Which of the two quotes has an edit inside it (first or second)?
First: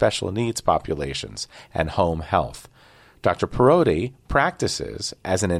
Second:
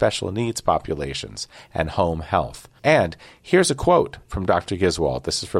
second